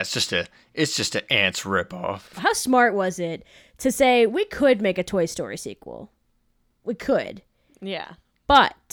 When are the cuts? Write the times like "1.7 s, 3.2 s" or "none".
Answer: 2.3 s